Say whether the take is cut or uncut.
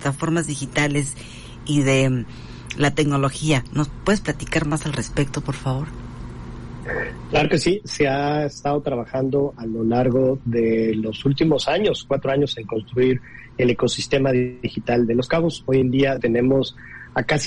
cut